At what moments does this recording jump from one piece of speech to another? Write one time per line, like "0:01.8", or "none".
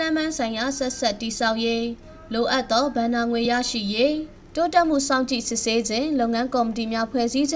none